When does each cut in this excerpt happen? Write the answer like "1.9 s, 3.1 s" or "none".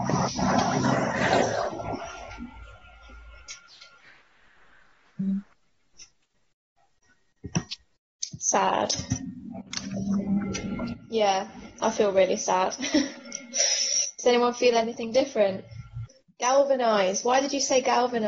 none